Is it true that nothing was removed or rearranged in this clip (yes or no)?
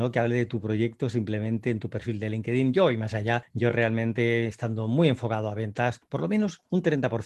yes